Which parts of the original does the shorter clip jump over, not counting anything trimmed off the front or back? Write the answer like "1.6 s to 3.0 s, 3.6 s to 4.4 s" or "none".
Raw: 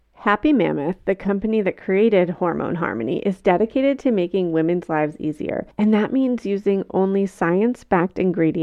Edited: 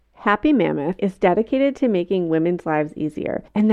1.0 s to 3.2 s